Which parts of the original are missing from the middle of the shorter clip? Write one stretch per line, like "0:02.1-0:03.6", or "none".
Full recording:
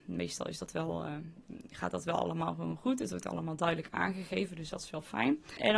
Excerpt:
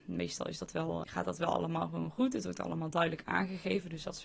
0:01.0-0:01.7

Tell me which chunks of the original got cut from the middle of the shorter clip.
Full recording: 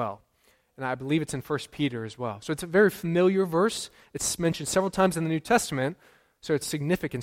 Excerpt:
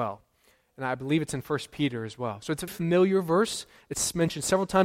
0:02.7-0:02.9

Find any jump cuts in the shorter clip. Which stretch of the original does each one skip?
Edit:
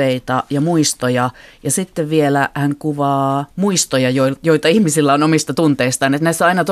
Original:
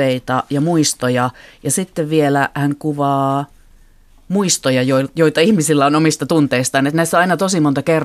0:03.5-0:04.2

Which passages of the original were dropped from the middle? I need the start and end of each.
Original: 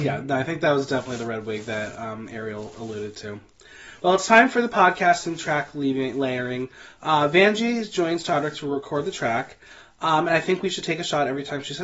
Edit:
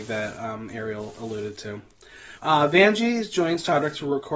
0:04.0-0:07.0

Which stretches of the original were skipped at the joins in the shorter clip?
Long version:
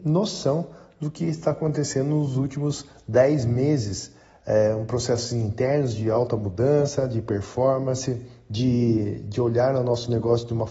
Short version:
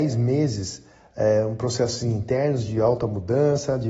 none

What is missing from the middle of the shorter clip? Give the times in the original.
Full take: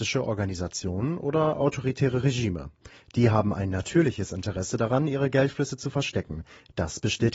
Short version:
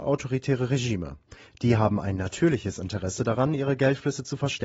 none

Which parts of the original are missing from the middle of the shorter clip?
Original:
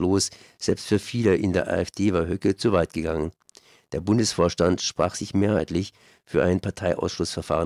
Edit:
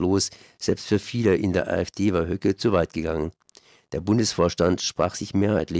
none

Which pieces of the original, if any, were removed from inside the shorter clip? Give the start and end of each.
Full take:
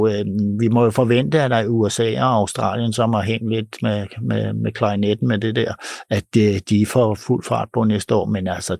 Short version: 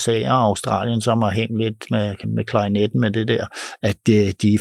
0:04.1-0:04.5

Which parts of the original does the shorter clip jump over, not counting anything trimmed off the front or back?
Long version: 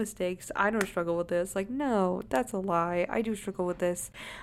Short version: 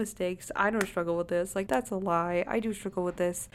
0:01.7-0:02.3

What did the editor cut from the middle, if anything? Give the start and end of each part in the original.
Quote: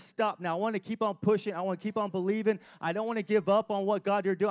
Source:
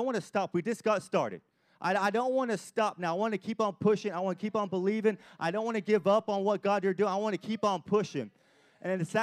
none

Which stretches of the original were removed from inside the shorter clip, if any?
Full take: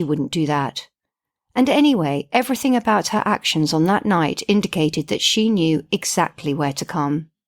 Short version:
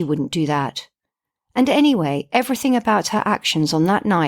none

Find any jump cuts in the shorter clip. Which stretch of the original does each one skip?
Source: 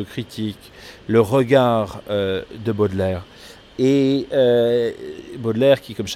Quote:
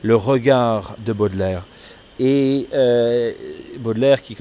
0:02.0-0:02.6

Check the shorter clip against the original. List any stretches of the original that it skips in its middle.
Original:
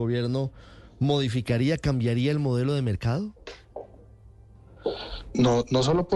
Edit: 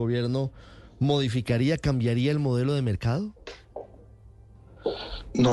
none

